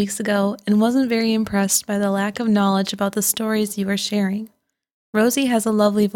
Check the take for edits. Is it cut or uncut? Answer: uncut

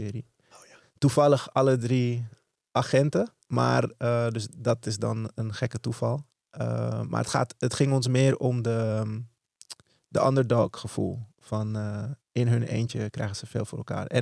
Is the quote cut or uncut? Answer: uncut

